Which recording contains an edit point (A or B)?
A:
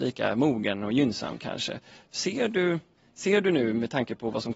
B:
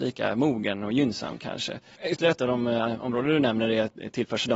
B